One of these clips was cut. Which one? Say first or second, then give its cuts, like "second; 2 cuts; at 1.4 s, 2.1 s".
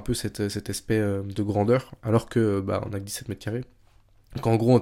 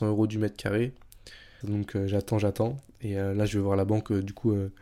second; 1 cut; at 1.6 s